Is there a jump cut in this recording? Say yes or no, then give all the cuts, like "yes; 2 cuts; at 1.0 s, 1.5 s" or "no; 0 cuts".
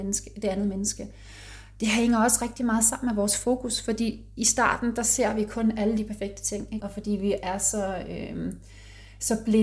yes; 1 cut; at 6.8 s